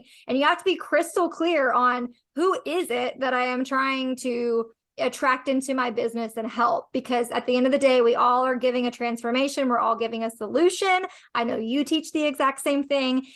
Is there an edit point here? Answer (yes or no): no